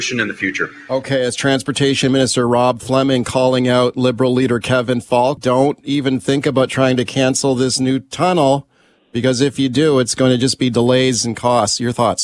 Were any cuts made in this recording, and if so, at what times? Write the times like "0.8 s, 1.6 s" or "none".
5.4 s